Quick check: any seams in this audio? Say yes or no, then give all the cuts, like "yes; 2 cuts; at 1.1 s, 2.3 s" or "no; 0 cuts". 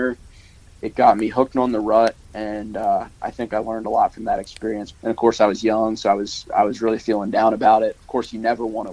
yes; 1 cut; at 4.9 s